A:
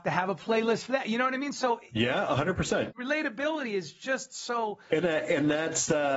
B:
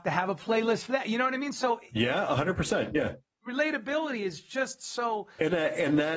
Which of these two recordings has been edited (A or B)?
A